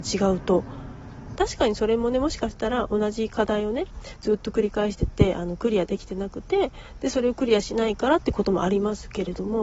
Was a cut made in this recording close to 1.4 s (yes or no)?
yes